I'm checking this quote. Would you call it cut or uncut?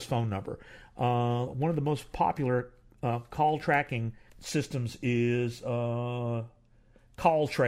cut